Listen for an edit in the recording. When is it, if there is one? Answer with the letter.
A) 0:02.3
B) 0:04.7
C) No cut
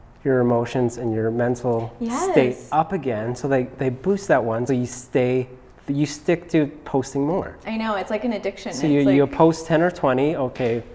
B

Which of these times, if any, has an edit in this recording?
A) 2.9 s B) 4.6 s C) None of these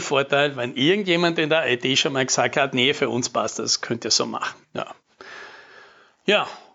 B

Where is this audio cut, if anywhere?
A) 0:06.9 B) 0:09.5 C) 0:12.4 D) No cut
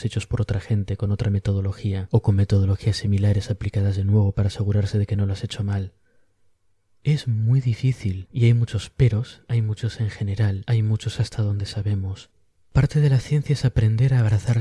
B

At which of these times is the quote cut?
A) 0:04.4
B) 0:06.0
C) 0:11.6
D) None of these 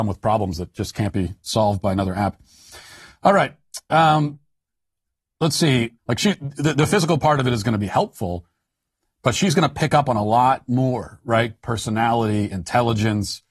B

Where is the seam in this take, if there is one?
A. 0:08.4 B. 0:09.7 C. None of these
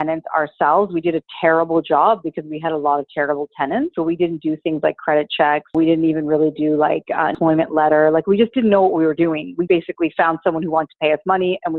B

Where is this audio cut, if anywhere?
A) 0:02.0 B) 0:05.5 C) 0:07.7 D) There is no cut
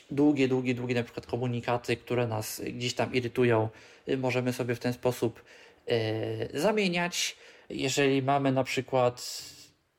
C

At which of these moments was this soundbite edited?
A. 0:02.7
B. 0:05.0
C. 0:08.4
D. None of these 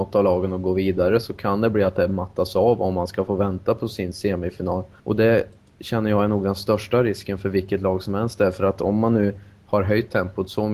B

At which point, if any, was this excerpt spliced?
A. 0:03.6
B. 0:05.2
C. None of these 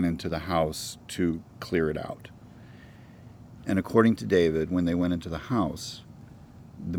A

